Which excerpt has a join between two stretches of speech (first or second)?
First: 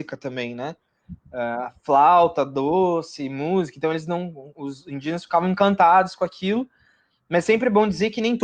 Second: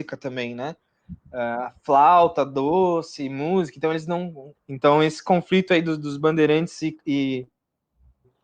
second